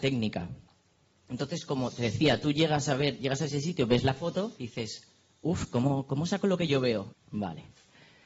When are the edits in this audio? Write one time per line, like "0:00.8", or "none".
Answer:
0:04.6
0:07.1

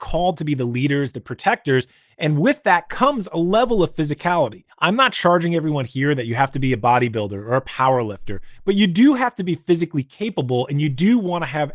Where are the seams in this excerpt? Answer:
0:01.1

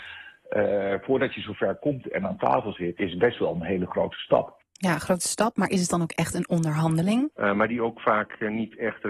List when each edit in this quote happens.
0:03.0
0:07.3

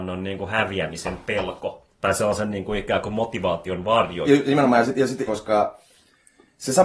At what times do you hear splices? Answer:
0:04.3
0:05.3

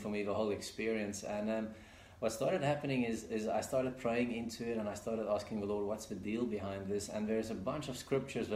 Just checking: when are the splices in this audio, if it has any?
none

